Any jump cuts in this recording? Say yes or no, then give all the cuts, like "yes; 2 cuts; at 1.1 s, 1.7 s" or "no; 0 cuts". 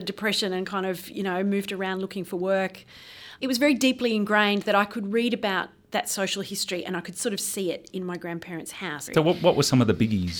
yes; 2 cuts; at 3.4 s, 9.1 s